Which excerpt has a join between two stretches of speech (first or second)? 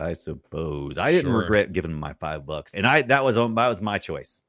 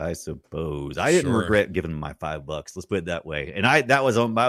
first